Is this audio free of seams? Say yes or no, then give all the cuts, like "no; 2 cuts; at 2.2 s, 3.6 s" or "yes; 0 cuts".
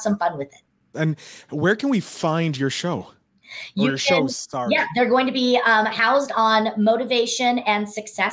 no; 1 cut; at 0.9 s